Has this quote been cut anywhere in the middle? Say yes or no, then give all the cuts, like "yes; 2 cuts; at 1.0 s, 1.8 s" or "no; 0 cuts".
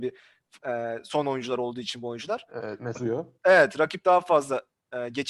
yes; 1 cut; at 2.9 s